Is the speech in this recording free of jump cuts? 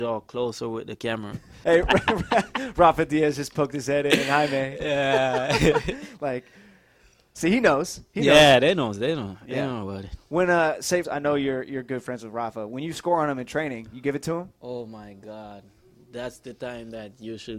no; 2 cuts; at 1.6 s, 11.0 s

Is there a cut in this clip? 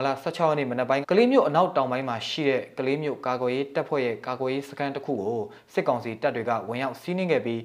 yes; 1 cut; at 1.0 s

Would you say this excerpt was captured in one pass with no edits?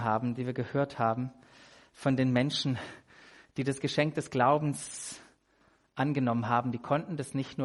yes; 0 cuts

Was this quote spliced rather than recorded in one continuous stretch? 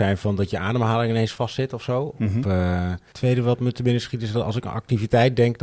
yes; 1 cut; at 3.1 s

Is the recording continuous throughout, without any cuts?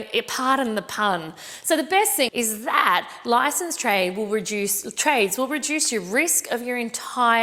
no; 1 cut; at 2.3 s

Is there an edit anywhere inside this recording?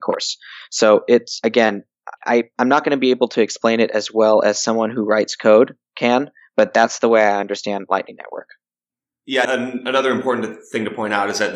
yes; 2 cuts; at 2.2 s, 9.5 s

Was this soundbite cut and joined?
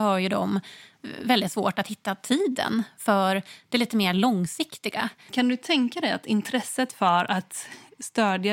yes; 1 cut; at 5.3 s

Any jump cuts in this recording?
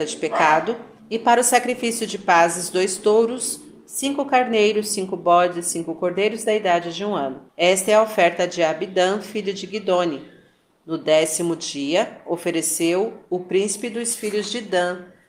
yes; 1 cut; at 7.5 s

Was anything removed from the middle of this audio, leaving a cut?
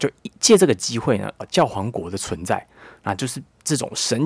yes; 1 cut; at 1.4 s

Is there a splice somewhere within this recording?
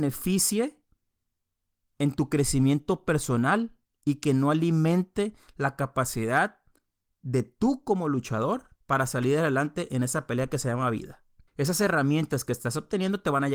yes; 2 cuts; at 8.8 s, 11.5 s

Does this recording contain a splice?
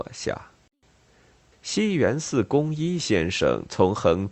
yes; 1 cut; at 1.5 s

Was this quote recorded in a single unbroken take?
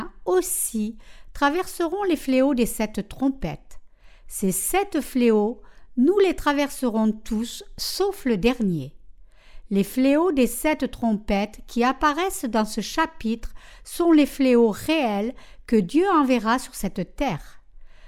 yes; 0 cuts

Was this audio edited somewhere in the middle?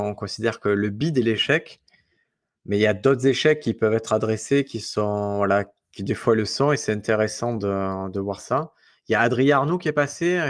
no; 0 cuts

